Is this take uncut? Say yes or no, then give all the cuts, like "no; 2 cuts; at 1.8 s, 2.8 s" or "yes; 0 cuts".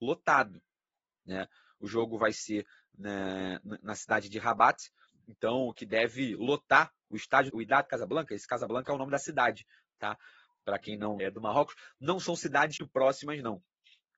no; 3 cuts; at 7.5 s, 11.2 s, 12.8 s